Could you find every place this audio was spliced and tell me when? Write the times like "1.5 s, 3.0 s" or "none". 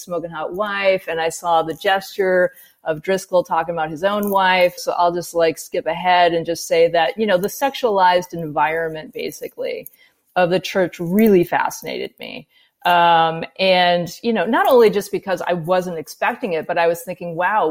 4.8 s